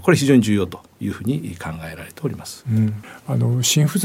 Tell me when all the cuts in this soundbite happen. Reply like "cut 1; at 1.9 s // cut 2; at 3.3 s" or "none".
none